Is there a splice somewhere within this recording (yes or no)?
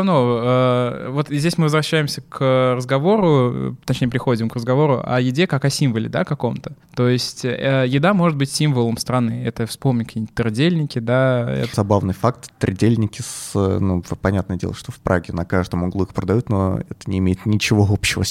yes